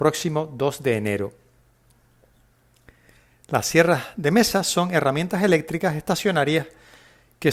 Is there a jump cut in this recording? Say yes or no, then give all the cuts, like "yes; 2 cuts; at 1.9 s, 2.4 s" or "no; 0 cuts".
no; 0 cuts